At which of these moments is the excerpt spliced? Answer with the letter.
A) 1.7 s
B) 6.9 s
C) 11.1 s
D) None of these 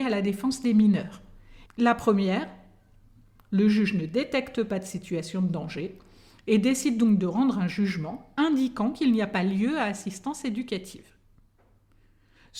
A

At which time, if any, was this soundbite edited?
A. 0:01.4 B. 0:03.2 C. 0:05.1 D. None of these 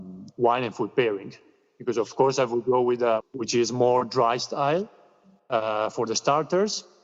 B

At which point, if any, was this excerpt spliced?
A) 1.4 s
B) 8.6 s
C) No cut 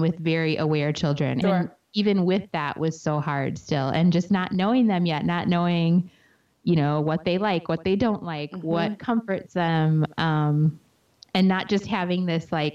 A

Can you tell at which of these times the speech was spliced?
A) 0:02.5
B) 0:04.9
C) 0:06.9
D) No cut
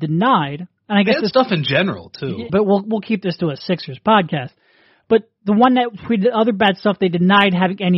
A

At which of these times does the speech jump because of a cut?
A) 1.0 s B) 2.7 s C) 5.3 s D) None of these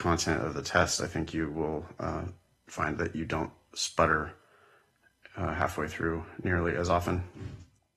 D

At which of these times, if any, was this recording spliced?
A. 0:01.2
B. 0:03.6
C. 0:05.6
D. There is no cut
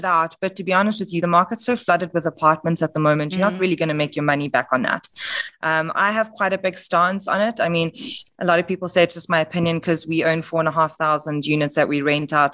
D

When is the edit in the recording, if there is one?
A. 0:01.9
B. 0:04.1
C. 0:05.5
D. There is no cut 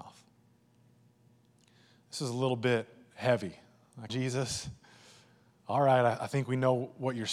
B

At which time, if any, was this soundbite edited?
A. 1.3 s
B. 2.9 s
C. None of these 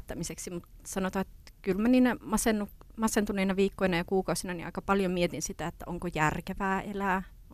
C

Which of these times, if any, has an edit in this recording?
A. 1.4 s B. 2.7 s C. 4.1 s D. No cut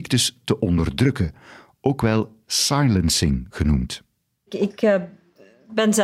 D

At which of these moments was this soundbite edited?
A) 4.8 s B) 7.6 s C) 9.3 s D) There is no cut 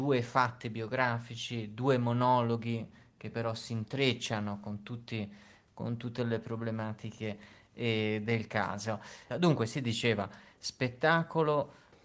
C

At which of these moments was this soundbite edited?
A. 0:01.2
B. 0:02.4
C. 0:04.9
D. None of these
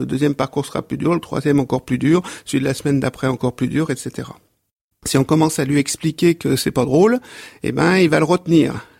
C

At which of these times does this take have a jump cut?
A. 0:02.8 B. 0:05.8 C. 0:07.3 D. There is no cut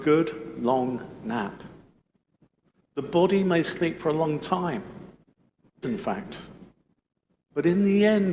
B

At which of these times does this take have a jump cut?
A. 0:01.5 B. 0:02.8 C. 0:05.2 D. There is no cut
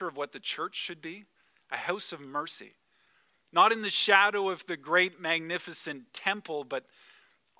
D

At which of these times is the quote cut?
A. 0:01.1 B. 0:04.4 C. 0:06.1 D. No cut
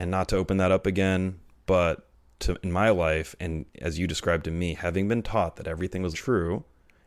C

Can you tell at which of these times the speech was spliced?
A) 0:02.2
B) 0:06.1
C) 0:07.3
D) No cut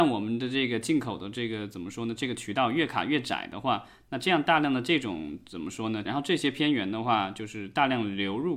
B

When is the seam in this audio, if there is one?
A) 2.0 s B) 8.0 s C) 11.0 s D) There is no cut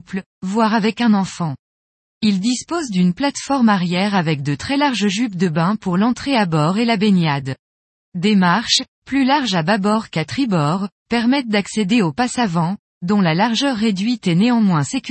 B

